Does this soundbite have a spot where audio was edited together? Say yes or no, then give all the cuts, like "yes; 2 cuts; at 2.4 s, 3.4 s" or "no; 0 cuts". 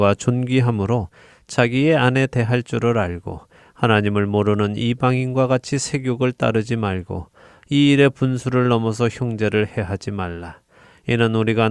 no; 0 cuts